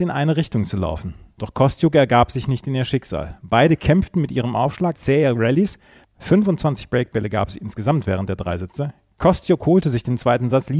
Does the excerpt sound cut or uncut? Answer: cut